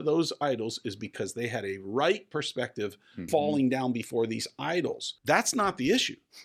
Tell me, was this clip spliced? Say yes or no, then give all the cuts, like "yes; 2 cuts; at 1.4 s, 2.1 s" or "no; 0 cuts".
yes; 2 cuts; at 3.3 s, 5.2 s